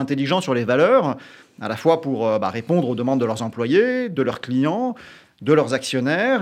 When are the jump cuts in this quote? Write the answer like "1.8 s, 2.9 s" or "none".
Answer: none

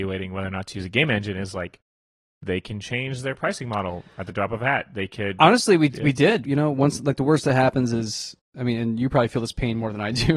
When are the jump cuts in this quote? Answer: 6.4 s

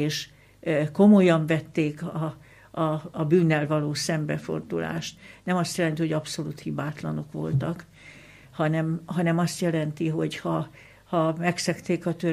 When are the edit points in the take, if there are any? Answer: none

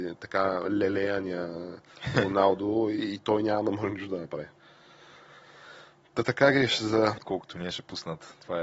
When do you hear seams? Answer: 7.2 s

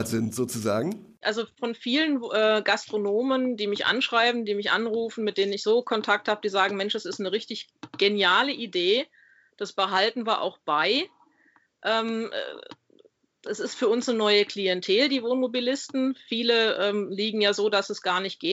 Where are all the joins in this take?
1.2 s

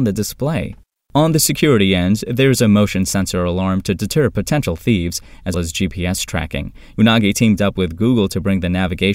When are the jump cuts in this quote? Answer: 5.5 s, 6.9 s

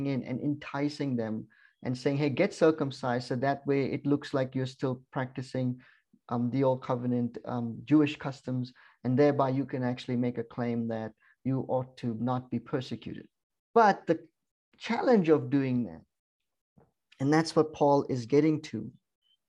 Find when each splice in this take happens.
none

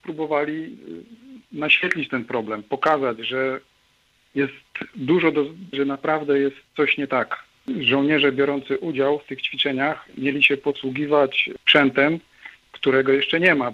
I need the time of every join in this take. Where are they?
5.7 s

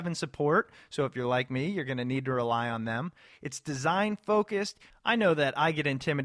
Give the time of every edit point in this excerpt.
4.9 s

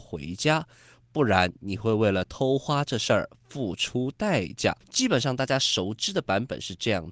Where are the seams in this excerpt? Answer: 4.8 s

